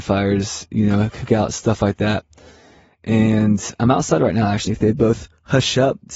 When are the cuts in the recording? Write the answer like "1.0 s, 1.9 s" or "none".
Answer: 4.7 s